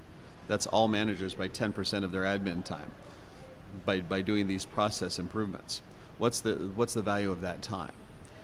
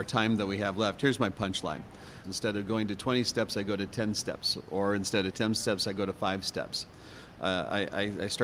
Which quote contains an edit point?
second; 2 cuts; at 2.2 s, 7.3 s

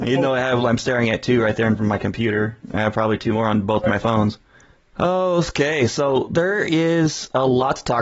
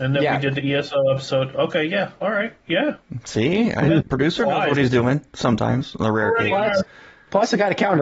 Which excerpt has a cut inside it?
second; 1 cut; at 4.0 s

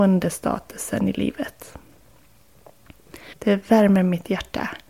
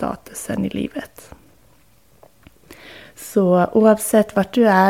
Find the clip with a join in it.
first; 1 cut; at 3.3 s

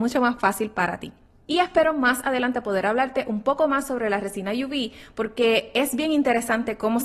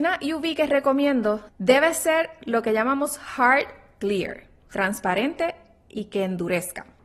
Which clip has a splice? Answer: second; 1 cut; at 1.5 s

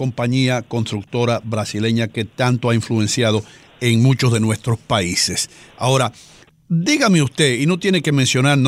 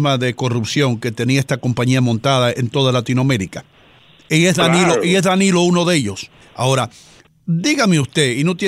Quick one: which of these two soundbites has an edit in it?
second; 1 cut; at 6.4 s

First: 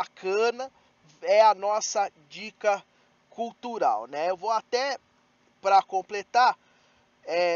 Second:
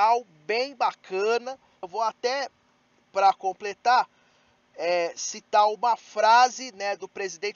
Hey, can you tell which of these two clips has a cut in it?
second; 1 cut; at 1.8 s

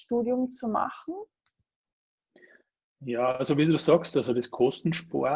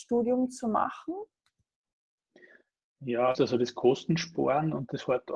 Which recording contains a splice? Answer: second; 1 cut; at 3.3 s

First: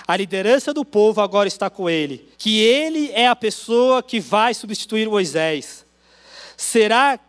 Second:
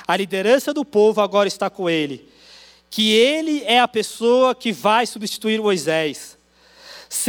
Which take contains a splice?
first; 1 cut; at 2.3 s

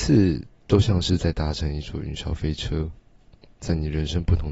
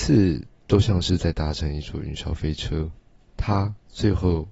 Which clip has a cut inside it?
second; 1 cut; at 3.3 s

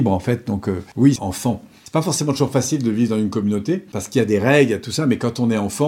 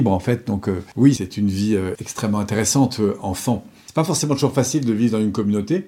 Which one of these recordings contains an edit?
first; 1 cut; at 1.2 s

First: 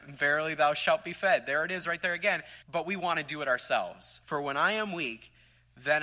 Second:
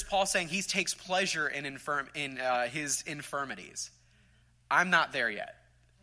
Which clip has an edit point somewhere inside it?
first; 2 cuts; at 2.6 s, 4.2 s

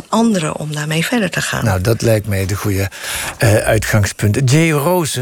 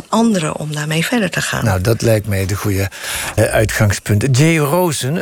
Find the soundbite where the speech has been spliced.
second; 1 cut; at 3.4 s

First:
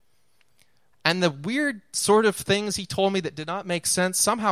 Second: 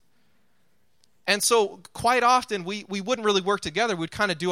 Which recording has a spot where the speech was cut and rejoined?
first; 1 cut; at 0.9 s

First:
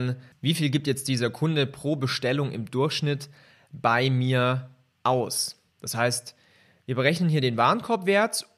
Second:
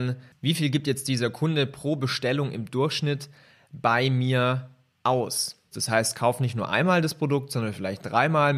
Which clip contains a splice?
second; 1 cut; at 5.7 s

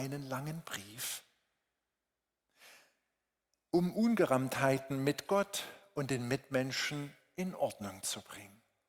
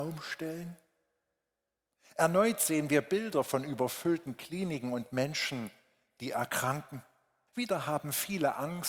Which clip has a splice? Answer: second; 1 cut; at 7.5 s

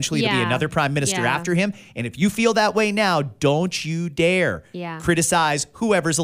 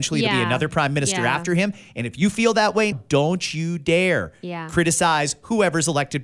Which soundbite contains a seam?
second; 1 cut; at 2.9 s

